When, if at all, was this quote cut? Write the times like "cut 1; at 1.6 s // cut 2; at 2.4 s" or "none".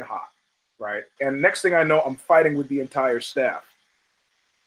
cut 1; at 1.2 s